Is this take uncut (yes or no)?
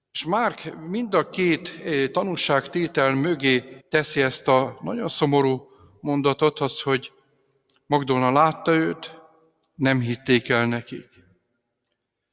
no